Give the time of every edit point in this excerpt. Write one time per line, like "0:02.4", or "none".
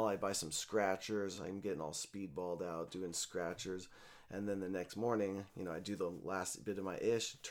none